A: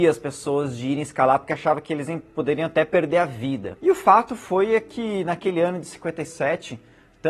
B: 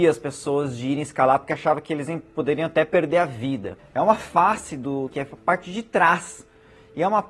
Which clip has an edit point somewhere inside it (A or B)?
B